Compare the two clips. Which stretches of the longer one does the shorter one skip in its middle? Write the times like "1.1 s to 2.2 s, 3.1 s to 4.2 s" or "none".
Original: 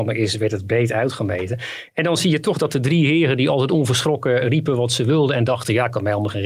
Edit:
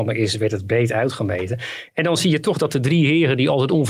none